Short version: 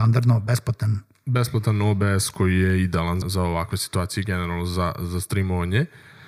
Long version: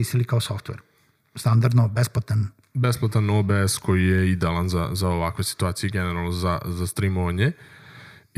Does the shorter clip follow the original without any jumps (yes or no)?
no